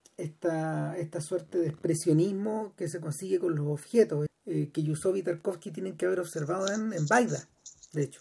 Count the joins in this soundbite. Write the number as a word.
one